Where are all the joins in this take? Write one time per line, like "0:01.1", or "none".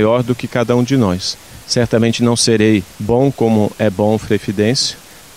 0:01.6
0:02.9

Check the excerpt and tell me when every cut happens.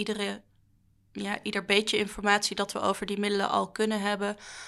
none

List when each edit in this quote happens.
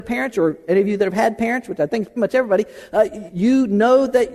0:02.2
0:03.3

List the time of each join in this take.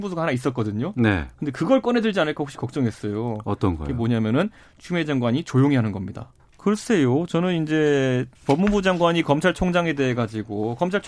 0:06.4
0:08.3

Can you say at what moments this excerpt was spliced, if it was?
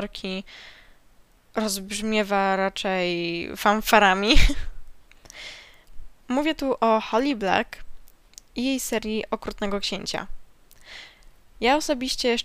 none

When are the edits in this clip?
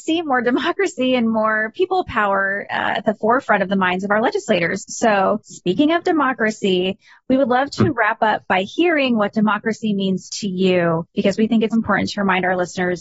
0:11.7

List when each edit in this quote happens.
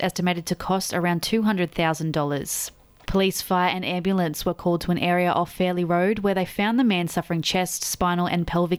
0:03.0

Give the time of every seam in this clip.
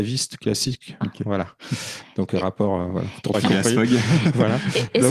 0:01.0
0:03.3

